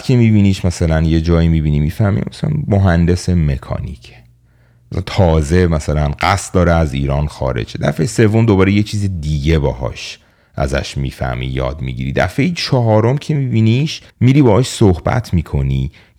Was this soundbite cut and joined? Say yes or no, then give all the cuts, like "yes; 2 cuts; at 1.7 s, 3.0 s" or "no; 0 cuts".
yes; 1 cut; at 14.1 s